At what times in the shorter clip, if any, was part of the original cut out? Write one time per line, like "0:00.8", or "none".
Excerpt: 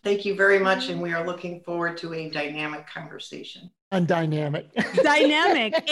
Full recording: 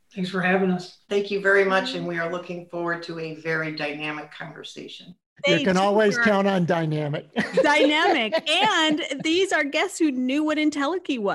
0:02.3
0:03.9